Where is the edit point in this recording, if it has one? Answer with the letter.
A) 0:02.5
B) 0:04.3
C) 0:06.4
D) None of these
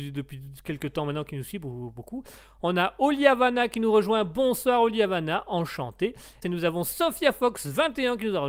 C